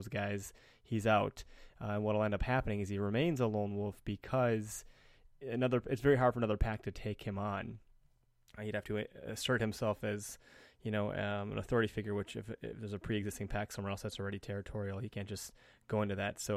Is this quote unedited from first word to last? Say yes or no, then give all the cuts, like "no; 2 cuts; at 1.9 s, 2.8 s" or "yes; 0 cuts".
yes; 0 cuts